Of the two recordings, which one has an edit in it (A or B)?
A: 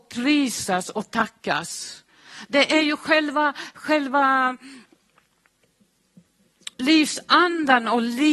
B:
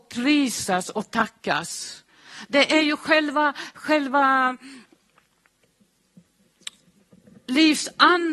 A